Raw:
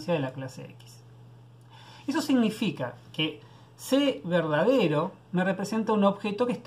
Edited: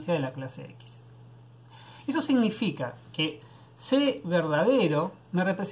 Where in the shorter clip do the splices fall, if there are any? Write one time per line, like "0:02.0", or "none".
none